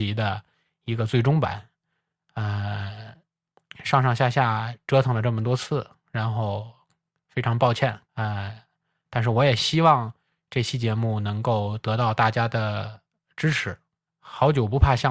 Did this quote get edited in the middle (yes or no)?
yes